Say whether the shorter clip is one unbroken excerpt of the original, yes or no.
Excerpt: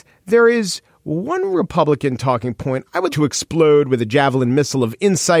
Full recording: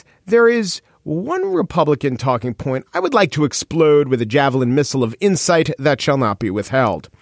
no